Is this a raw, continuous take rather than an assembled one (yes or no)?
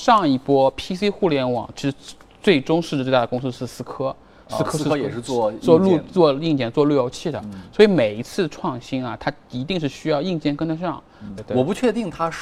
no